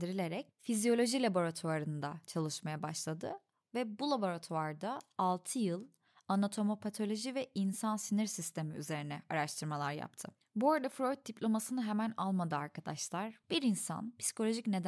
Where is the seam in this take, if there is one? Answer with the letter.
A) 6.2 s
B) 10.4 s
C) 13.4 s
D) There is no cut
C